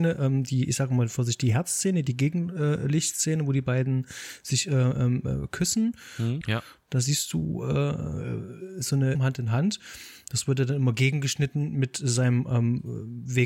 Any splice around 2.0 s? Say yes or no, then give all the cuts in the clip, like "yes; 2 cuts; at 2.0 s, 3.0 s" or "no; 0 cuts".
no; 2 cuts; at 6.4 s, 9.1 s